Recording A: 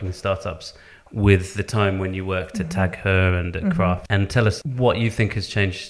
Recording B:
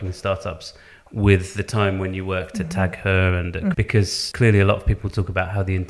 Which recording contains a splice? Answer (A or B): B